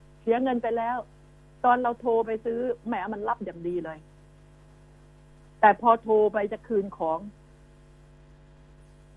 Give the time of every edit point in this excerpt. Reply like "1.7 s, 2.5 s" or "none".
none